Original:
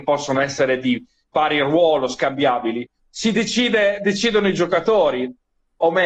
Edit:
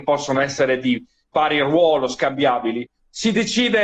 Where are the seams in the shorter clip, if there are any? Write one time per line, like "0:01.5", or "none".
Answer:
none

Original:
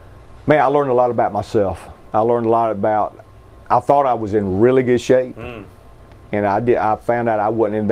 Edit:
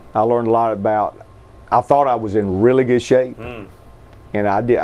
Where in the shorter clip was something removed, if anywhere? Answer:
none

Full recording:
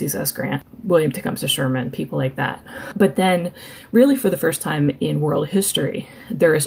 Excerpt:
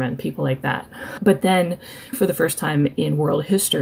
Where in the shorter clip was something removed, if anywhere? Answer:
0:02.1

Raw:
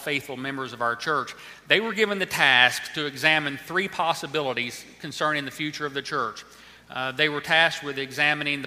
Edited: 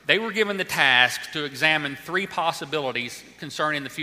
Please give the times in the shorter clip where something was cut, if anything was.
none

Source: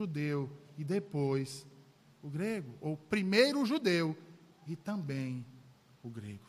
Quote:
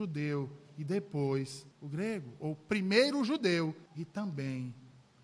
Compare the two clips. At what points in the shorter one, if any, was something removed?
0:01.7
0:03.9

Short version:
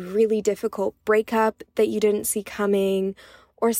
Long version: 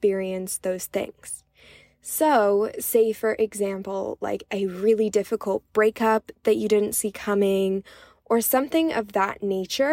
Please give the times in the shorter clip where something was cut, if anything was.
none

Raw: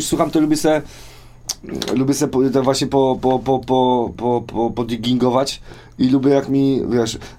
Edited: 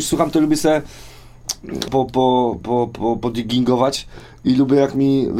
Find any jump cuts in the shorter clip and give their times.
0:01.9

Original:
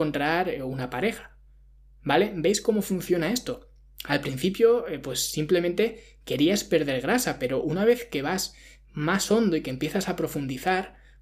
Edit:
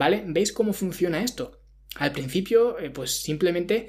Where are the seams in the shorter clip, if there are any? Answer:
none

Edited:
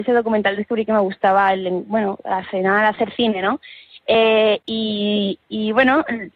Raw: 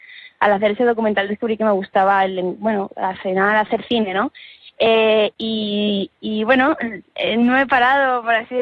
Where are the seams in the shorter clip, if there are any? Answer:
none

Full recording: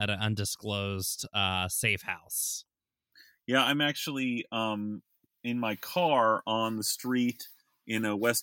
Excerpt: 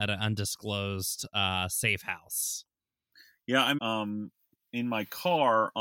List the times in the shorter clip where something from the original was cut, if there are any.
0:03.8

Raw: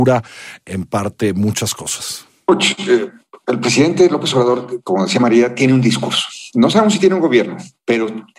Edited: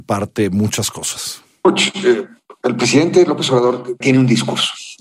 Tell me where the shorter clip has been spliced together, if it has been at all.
0:04.0

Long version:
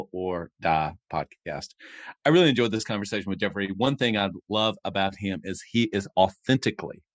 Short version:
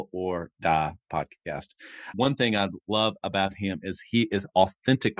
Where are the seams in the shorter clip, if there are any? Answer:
0:02.1

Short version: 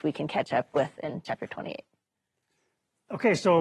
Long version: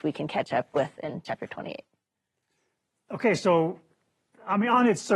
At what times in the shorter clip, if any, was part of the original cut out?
none

